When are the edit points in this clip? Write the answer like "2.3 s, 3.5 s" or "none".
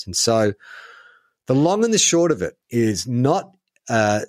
2.6 s